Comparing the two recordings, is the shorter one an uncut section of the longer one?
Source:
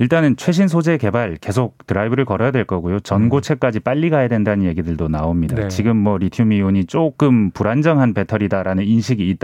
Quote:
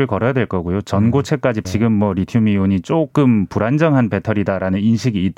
no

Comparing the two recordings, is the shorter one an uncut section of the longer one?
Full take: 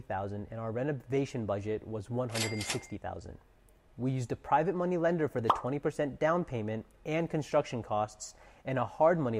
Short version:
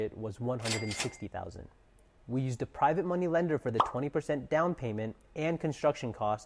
yes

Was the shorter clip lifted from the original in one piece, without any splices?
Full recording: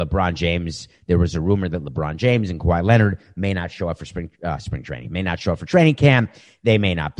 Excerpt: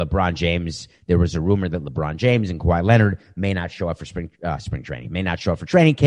yes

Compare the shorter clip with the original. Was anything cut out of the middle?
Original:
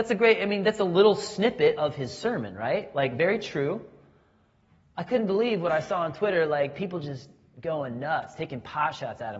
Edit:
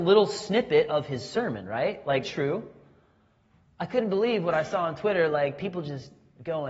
yes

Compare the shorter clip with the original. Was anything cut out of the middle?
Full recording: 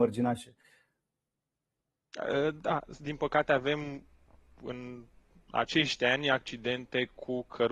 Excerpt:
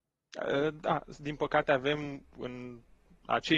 yes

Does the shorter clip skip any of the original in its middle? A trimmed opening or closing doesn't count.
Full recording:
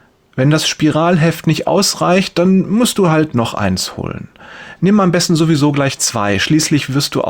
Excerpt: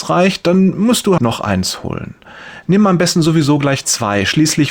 yes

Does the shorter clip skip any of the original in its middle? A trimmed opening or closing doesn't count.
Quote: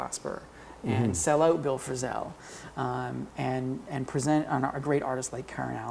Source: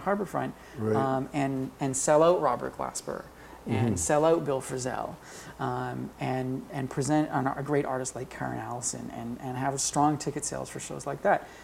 no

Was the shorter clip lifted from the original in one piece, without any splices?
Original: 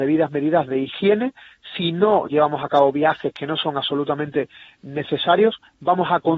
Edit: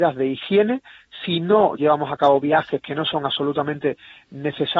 yes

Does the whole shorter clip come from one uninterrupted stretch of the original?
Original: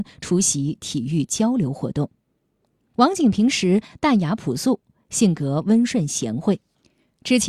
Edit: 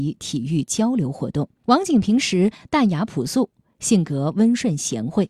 no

